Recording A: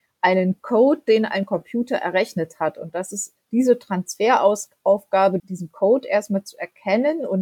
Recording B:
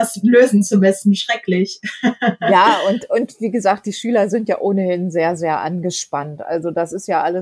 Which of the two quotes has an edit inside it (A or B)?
A